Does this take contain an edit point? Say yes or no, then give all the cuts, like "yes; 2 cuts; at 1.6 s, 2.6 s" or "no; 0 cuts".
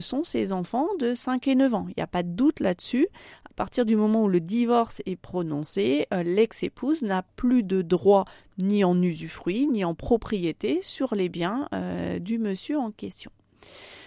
no; 0 cuts